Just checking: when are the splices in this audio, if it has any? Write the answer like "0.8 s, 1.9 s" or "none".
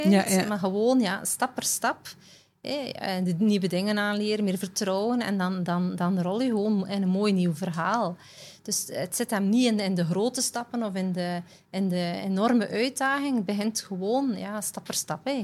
none

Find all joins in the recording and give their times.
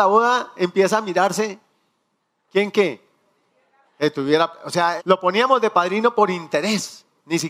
3.8 s, 5.0 s

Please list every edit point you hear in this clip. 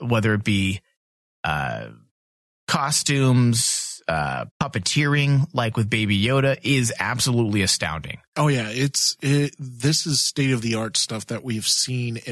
4.5 s

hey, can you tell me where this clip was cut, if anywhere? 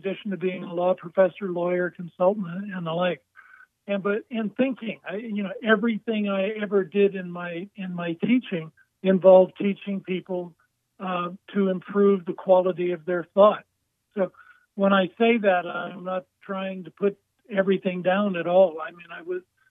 3.7 s, 14.1 s

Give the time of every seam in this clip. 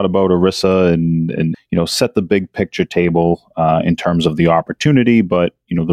1.5 s

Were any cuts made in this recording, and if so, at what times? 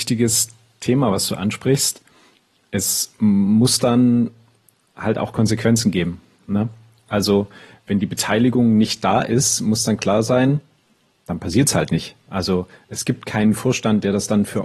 none

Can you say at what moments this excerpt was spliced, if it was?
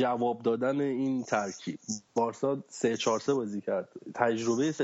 2.1 s

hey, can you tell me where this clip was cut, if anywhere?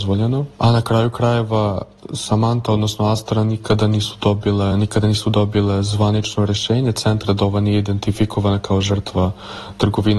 4.7 s

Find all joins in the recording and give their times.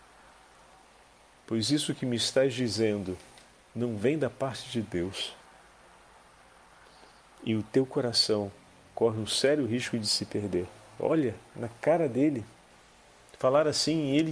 1.3 s, 11.0 s

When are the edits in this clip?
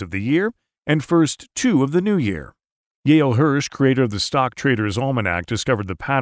none

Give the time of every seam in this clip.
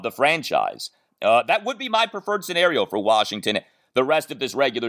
1.1 s

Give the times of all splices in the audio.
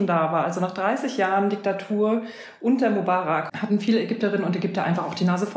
3.5 s

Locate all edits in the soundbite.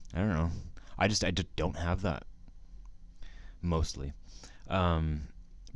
none

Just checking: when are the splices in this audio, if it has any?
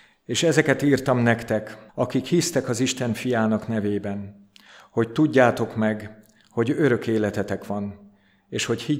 1.9 s

